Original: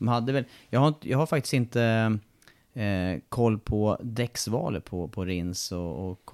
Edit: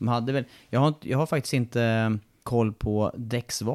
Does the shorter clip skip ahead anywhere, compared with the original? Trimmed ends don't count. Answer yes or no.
yes